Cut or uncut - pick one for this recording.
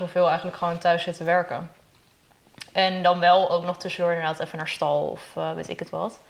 uncut